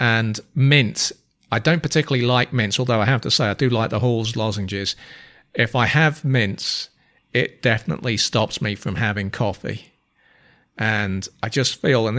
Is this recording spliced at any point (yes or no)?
no